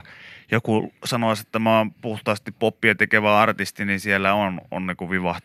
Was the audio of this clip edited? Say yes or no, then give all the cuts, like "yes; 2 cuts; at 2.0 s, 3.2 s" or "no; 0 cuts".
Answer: no; 0 cuts